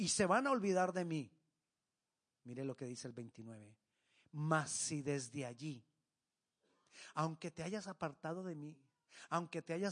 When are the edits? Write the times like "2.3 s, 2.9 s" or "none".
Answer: none